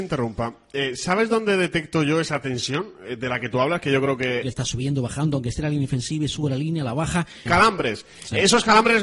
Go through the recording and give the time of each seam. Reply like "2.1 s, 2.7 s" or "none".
4.4 s, 7.5 s